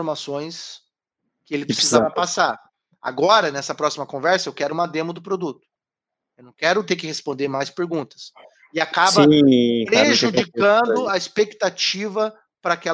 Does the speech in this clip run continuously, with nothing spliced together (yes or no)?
yes